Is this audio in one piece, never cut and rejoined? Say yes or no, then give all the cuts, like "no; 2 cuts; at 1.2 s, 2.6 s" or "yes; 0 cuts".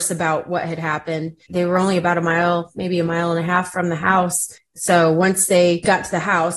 no; 2 cuts; at 1.5 s, 4.8 s